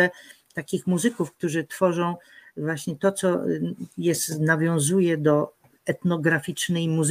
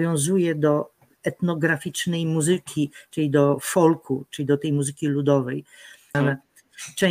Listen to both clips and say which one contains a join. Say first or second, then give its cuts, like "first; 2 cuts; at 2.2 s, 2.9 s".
second; 1 cut; at 6.1 s